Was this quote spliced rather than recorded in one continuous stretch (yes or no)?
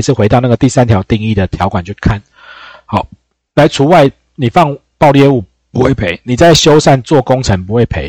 no